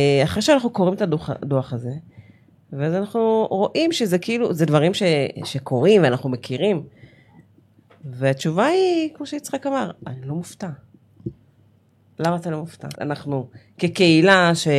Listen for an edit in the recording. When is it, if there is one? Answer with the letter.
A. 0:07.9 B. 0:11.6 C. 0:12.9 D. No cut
C